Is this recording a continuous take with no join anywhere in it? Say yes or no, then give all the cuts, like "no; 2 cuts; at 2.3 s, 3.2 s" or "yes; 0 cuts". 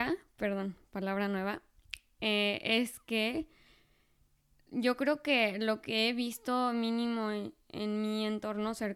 yes; 0 cuts